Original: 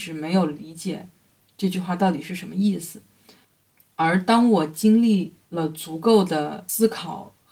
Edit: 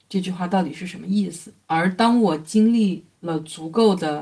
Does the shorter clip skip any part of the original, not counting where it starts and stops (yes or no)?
yes